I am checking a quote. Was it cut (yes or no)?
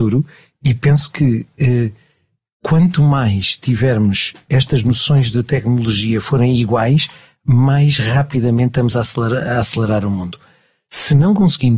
no